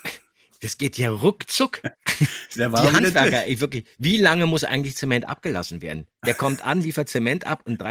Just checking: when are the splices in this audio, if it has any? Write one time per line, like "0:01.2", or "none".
none